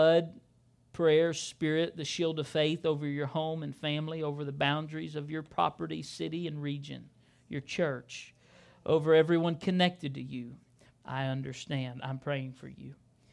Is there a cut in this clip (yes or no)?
yes